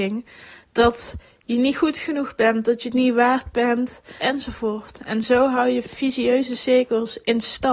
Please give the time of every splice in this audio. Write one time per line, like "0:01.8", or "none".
0:04.2
0:05.8